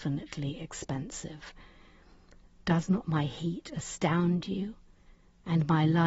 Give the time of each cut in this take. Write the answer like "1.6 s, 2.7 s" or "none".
none